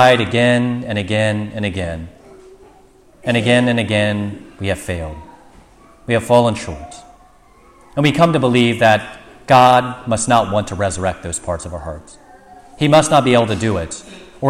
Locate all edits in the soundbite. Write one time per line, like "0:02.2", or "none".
none